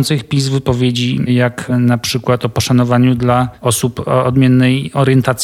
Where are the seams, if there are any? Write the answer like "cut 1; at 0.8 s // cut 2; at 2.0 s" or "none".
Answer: none

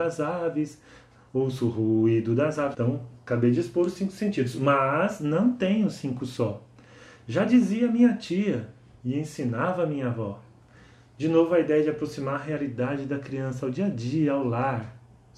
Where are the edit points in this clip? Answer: cut 1; at 2.7 s

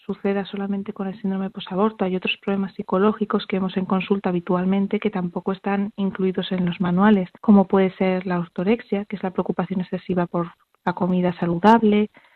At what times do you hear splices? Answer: cut 1; at 7.4 s

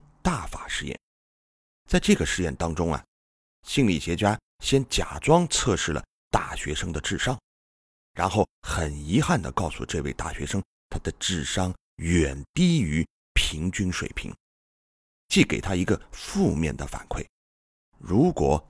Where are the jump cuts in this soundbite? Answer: none

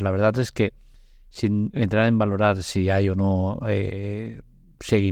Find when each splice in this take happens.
none

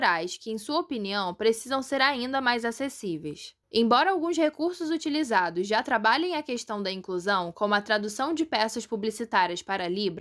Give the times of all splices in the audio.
none

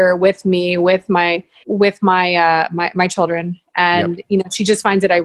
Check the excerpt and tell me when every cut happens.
cut 1; at 1.6 s

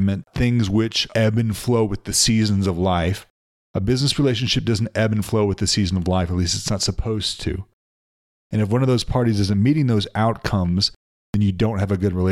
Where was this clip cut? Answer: cut 1; at 8.3 s

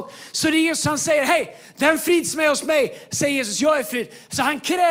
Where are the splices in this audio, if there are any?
none

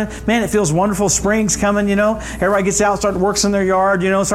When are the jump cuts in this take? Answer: none

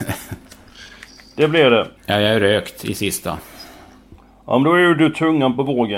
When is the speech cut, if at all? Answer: cut 1; at 2.0 s

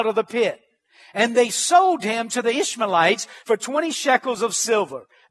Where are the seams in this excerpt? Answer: none

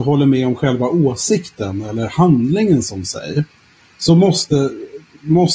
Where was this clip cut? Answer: none

